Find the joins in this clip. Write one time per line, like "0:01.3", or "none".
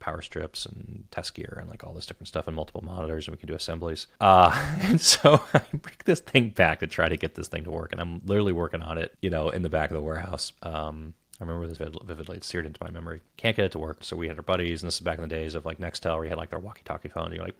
0:10.6
0:11.8
0:14.0